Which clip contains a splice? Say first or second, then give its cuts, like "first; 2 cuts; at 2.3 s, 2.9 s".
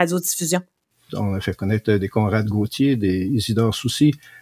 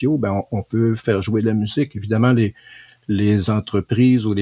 first; 1 cut; at 1.1 s